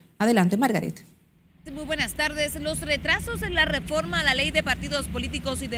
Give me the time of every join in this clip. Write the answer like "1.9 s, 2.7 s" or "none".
1.7 s